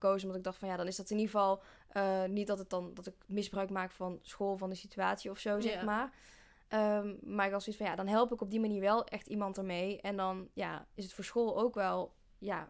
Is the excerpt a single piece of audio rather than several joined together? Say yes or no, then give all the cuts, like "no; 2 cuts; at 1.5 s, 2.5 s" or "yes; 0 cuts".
yes; 0 cuts